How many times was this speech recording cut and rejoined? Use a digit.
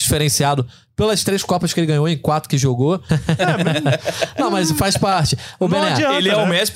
1